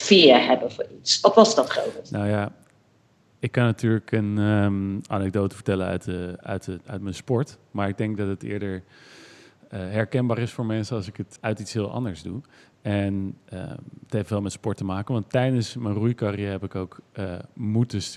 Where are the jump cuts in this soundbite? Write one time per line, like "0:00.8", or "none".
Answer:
0:11.4